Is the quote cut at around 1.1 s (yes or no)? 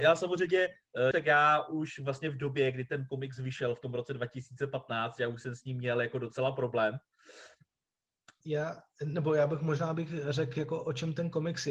yes